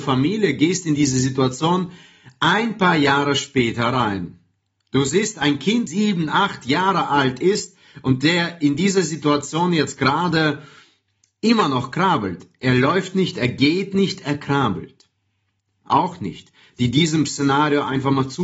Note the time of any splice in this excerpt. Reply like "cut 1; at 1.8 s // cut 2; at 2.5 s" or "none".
cut 1; at 5.9 s // cut 2; at 15.8 s

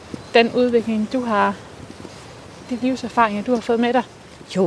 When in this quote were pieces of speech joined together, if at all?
cut 1; at 2.6 s

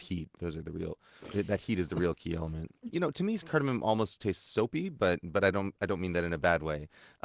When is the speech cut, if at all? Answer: cut 1; at 2.9 s

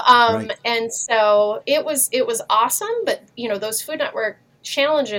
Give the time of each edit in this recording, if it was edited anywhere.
none

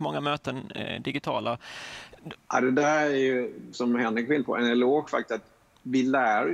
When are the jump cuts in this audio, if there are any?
cut 1; at 2.3 s // cut 2; at 3.7 s

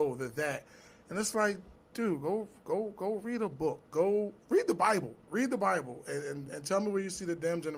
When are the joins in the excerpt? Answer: cut 1; at 5.3 s // cut 2; at 6.5 s

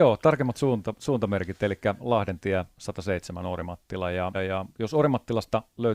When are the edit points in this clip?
cut 1; at 4.3 s

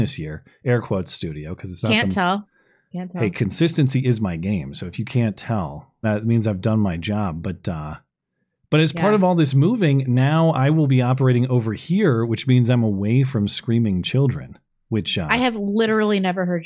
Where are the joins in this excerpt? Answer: cut 1; at 6.0 s

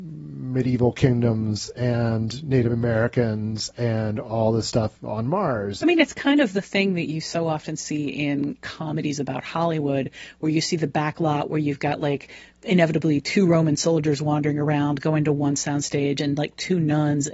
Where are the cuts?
cut 1; at 5.8 s // cut 2; at 8.6 s

